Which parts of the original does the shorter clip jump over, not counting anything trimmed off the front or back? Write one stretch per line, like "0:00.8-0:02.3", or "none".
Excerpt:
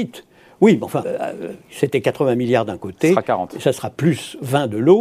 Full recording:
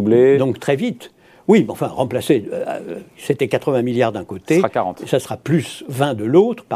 0:01.9-0:02.5